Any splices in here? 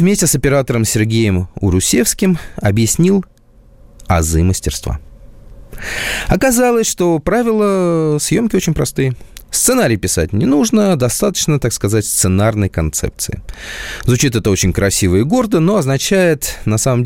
no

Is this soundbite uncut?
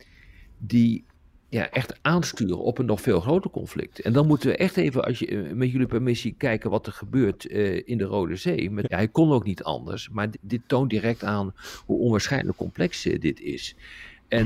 no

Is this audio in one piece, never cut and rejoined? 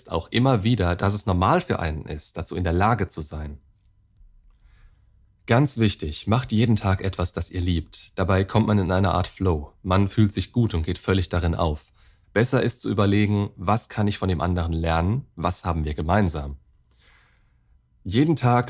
no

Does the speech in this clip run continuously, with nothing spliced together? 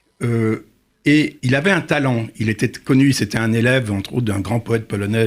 no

